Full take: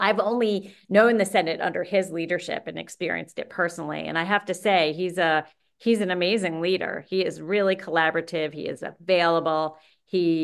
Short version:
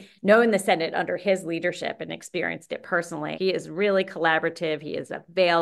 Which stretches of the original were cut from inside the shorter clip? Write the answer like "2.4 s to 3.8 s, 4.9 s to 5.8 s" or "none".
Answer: 4.0 s to 7.1 s